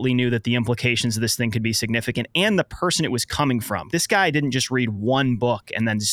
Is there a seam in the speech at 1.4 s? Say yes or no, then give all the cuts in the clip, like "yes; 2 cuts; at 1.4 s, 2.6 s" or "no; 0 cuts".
no; 1 cut; at 3.9 s